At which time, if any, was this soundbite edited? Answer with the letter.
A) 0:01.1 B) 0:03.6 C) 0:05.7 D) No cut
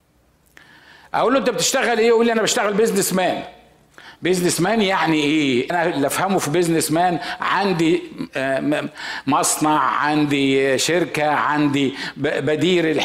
C